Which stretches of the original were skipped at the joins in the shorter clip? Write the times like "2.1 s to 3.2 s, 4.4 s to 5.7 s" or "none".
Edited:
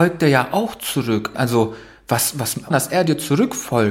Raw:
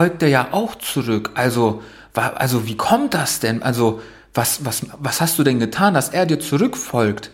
1.3 s to 3.6 s, 5.0 s to 5.9 s